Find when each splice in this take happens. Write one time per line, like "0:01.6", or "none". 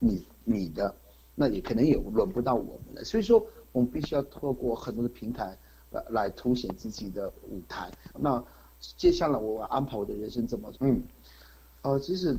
0:08.1
0:10.8

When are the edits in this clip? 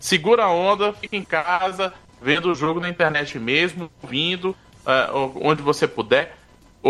none

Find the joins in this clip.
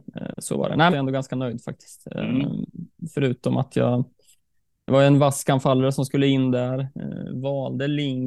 0:00.9

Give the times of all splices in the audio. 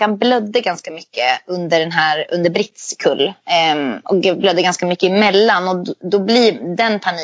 none

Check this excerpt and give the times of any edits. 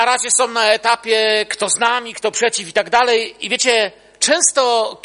none

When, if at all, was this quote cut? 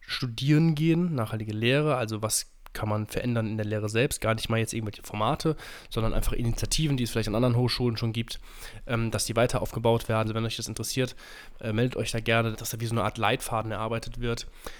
0:10.2
0:12.5

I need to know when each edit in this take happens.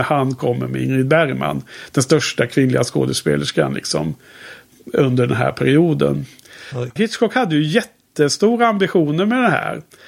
0:07.0

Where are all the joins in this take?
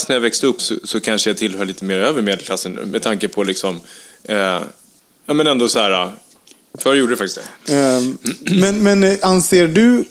0:06.8

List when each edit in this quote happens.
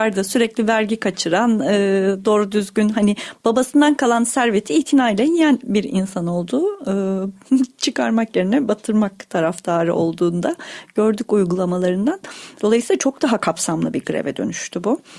0:12.6

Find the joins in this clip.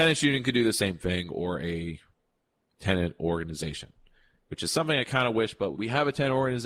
0:05.7

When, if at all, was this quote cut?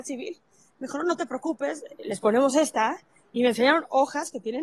none

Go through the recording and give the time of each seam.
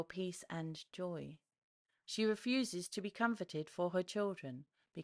0:02.0

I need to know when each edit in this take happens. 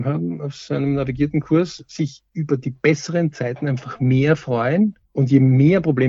0:05.1

